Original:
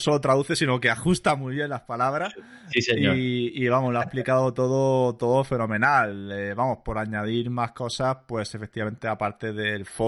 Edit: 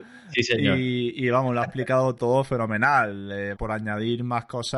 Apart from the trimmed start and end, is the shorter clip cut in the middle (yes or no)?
yes